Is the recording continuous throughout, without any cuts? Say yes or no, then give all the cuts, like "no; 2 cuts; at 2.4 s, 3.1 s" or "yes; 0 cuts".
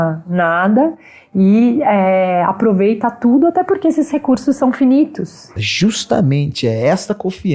no; 1 cut; at 5.6 s